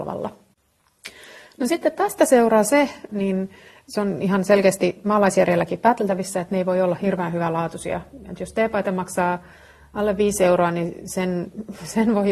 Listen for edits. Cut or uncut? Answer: cut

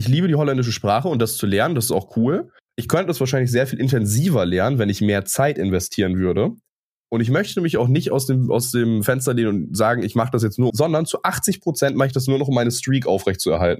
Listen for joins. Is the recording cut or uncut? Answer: cut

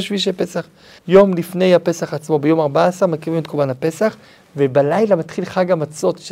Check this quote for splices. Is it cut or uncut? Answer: cut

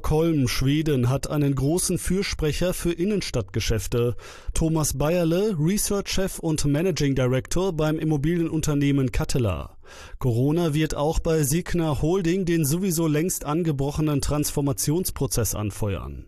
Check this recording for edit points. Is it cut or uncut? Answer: cut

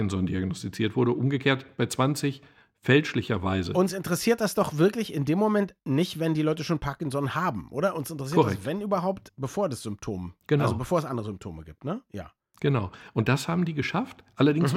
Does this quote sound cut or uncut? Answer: uncut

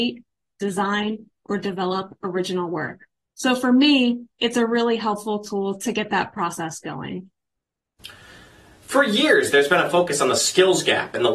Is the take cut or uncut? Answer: uncut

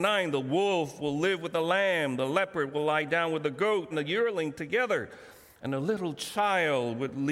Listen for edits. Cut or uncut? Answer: cut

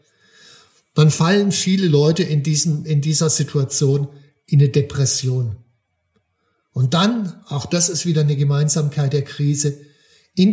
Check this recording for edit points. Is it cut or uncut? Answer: uncut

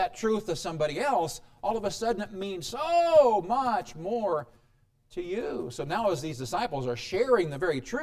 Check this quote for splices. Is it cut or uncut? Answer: uncut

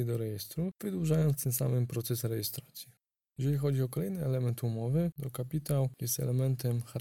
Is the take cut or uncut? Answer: cut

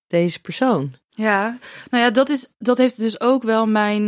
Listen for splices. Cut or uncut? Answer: cut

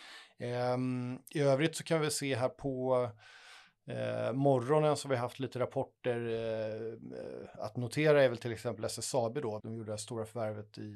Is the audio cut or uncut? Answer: cut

